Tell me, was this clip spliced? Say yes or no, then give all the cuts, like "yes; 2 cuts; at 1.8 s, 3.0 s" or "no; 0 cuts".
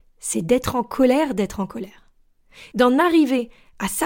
yes; 1 cut; at 2.7 s